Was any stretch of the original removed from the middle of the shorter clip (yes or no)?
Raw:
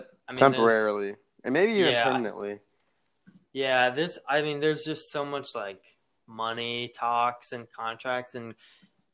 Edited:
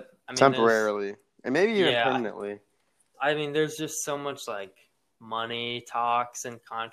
yes